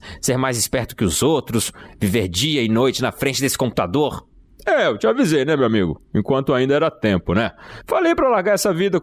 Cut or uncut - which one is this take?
uncut